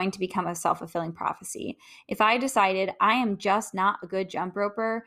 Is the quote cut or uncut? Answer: uncut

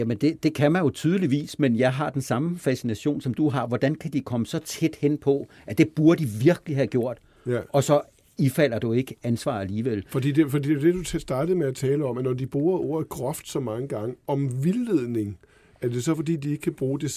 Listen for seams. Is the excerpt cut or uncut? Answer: uncut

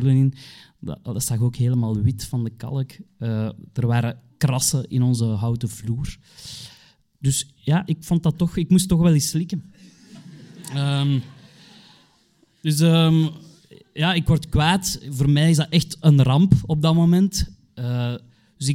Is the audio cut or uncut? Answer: uncut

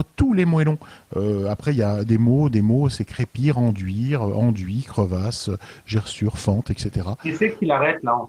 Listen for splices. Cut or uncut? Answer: uncut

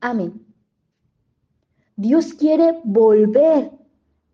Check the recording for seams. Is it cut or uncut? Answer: cut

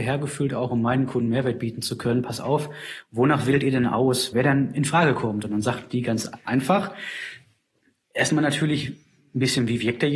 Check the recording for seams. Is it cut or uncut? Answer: cut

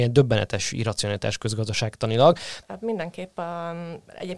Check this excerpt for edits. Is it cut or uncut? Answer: cut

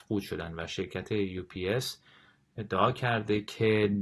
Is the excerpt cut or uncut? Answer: uncut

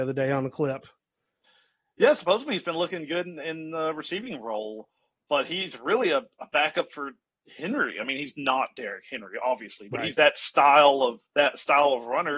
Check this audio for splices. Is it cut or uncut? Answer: cut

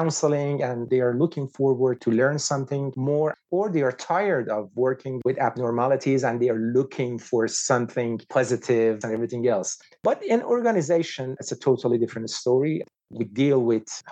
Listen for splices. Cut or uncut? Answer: cut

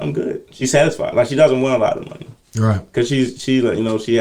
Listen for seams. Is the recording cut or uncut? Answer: uncut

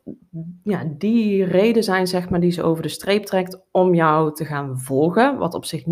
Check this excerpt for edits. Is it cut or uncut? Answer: uncut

